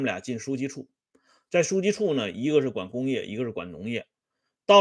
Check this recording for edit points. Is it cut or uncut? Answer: uncut